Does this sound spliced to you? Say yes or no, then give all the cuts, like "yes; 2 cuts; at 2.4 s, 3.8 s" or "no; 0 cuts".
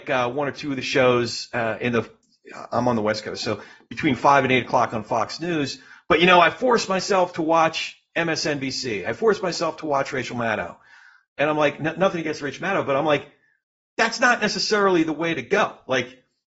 no; 0 cuts